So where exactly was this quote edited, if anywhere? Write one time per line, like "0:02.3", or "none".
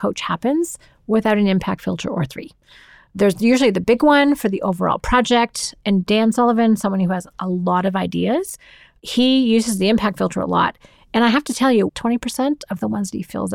0:11.9